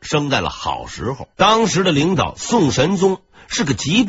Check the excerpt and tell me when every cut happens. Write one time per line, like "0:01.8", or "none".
0:01.3